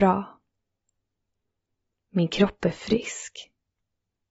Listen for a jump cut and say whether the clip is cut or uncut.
uncut